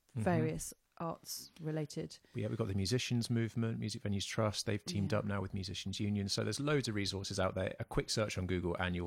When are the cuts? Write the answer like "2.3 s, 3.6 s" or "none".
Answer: none